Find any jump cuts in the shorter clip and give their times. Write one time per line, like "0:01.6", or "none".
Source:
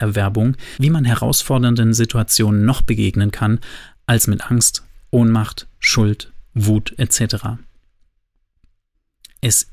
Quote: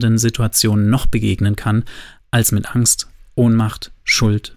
none